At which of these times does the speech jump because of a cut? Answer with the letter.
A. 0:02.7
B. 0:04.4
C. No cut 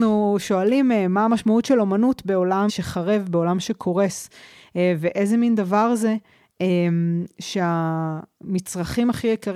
A